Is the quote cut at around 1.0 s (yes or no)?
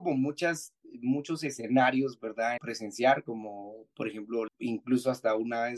no